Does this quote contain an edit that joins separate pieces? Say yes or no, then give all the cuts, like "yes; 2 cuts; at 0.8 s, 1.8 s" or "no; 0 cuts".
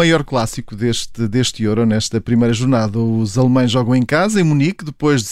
no; 0 cuts